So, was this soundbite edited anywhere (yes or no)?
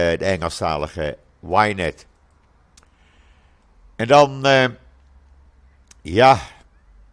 no